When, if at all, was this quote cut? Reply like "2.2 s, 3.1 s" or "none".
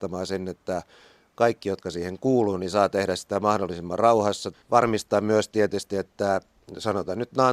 4.5 s